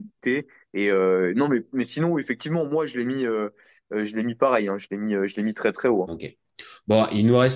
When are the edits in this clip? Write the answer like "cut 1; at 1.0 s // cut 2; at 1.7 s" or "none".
cut 1; at 6.1 s